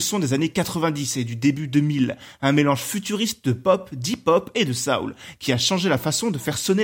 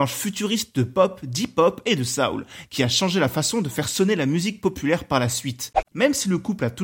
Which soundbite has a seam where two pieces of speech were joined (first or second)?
second